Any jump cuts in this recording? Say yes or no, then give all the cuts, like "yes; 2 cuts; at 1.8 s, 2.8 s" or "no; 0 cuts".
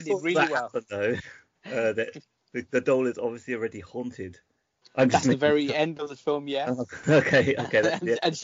yes; 2 cuts; at 1.5 s, 4.8 s